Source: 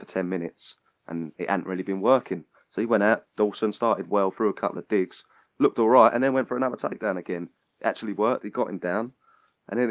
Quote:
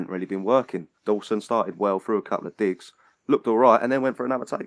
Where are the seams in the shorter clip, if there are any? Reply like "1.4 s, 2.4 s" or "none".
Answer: 1.0 s